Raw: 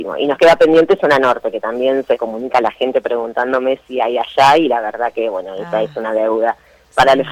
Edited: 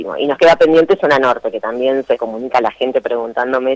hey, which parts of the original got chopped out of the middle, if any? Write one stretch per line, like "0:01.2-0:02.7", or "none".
none

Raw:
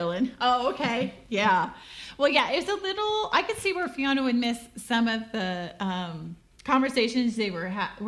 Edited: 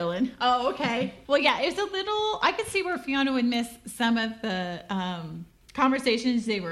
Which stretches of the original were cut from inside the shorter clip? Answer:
0:01.2-0:02.2

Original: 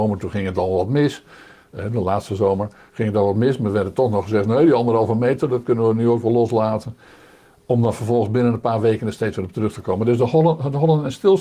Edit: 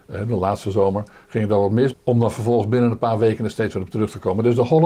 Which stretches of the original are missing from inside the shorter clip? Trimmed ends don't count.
0:03.6-0:07.6

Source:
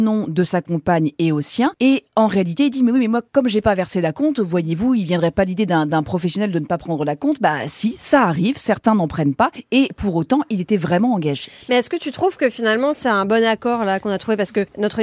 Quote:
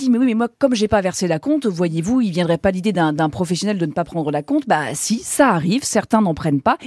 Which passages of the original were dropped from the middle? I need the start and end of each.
none

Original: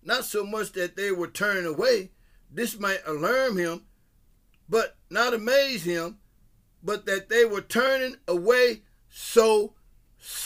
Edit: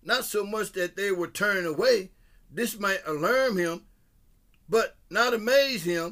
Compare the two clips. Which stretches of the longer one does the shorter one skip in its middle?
none

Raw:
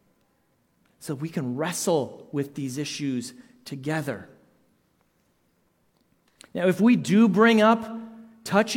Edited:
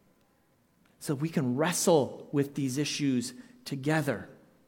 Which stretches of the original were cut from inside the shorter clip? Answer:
none

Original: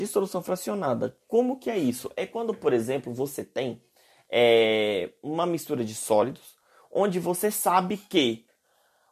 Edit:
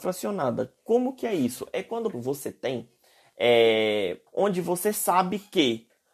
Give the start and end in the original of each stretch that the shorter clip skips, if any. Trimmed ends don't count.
0:02.6-0:03.0
0:05.2-0:06.8

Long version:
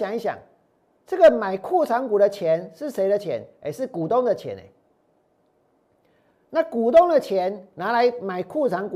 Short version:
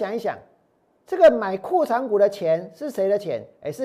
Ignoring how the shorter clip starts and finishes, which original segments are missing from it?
none

